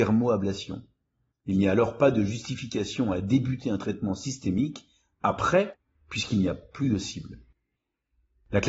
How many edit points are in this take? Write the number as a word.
zero